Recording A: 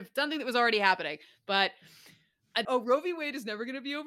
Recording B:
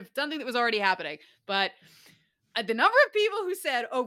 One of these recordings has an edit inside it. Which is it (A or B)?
A